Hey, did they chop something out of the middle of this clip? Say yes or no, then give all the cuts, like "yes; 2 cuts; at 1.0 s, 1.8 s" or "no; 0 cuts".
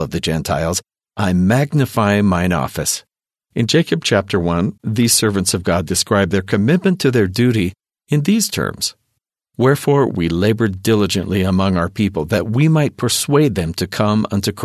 yes; 2 cuts; at 3.3 s, 4.8 s